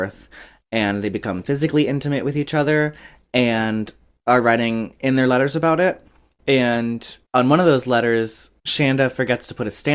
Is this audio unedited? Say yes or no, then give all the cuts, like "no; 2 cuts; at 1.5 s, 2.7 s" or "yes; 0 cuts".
yes; 0 cuts